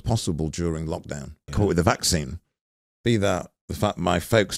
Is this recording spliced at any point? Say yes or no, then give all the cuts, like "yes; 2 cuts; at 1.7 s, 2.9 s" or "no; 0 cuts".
yes; 1 cut; at 1.5 s